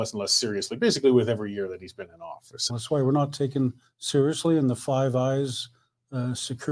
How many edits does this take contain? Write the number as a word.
one